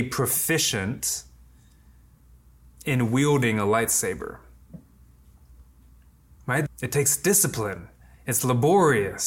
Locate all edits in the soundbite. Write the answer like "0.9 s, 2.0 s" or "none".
6.7 s, 8.1 s